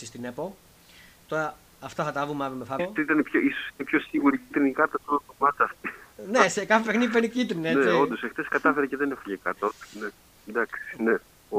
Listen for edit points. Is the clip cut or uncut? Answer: cut